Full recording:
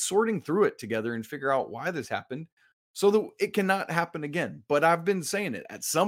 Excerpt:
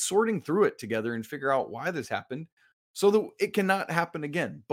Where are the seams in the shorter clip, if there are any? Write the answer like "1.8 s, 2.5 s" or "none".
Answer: none